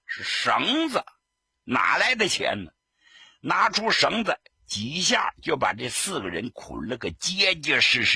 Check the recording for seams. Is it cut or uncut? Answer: uncut